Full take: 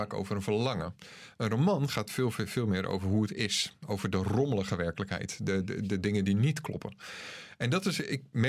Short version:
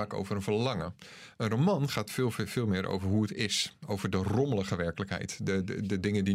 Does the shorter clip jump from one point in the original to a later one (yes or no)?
no